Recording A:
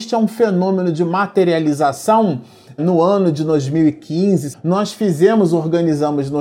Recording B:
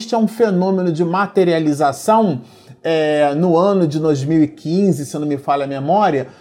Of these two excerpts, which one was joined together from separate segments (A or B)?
A